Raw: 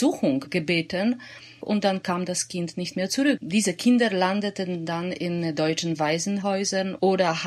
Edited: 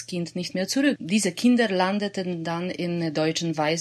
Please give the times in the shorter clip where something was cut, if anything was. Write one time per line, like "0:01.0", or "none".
none